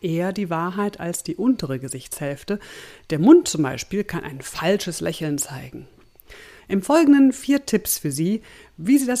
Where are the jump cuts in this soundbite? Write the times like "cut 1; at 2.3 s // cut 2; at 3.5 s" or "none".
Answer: cut 1; at 6.6 s